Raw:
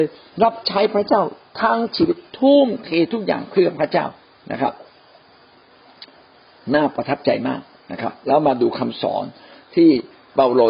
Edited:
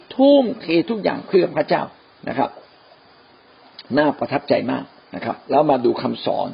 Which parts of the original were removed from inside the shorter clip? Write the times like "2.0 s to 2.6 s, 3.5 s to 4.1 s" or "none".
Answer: 6.1 s to 6.6 s